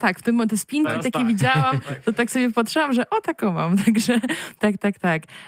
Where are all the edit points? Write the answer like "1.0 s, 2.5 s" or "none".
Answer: none